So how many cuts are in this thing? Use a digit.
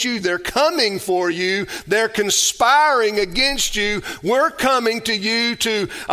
0